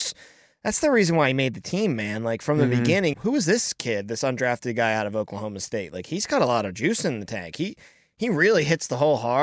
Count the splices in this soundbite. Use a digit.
1